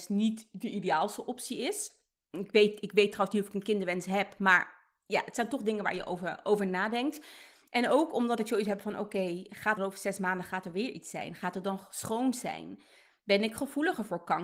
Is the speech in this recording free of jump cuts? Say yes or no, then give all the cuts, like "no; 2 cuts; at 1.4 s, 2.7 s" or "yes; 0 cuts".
no; 1 cut; at 9.8 s